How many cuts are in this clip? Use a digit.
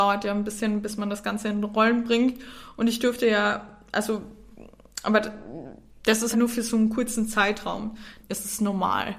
2